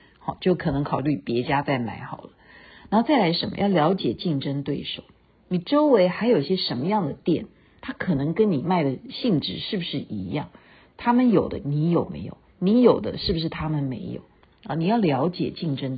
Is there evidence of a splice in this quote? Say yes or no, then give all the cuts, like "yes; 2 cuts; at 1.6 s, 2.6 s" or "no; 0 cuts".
no; 0 cuts